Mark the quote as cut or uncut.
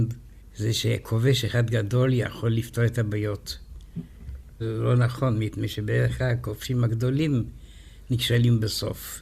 uncut